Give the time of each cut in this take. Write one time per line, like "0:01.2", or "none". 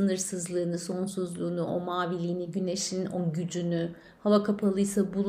none